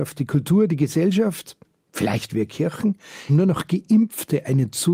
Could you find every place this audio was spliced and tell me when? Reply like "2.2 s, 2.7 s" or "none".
3.3 s